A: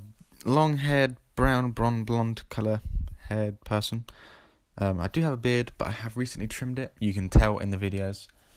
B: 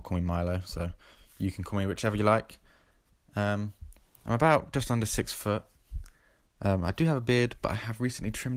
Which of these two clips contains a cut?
B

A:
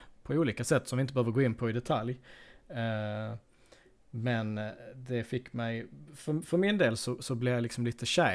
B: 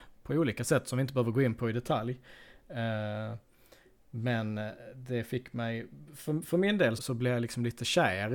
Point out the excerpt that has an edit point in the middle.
B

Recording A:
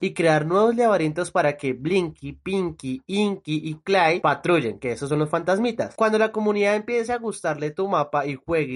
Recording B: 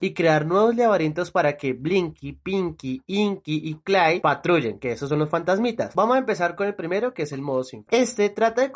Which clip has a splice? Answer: B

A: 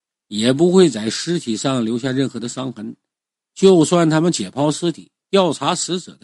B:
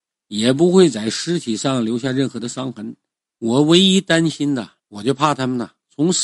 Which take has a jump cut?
B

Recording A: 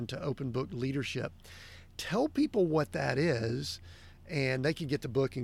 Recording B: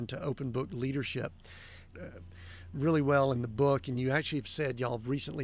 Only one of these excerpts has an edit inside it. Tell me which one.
B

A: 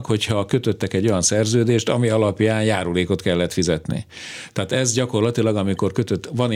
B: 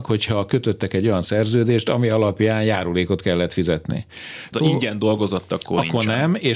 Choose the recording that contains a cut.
B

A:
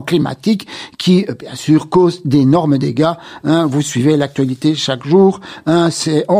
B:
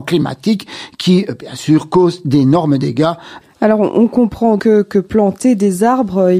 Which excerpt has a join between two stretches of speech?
B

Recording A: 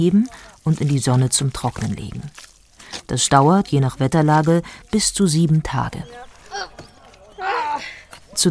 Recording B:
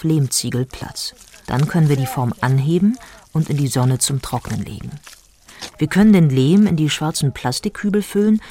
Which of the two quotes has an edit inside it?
B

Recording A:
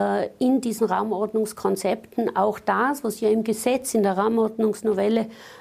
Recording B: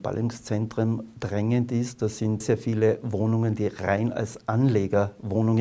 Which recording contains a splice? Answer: B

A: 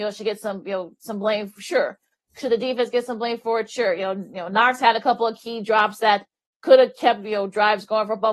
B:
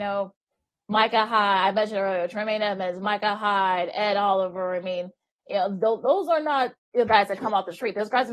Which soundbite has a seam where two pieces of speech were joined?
B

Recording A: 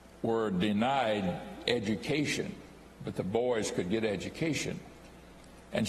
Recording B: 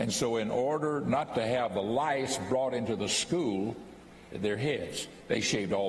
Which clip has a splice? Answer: B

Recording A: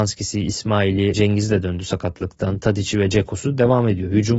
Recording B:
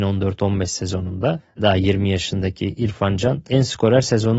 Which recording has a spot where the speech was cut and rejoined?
A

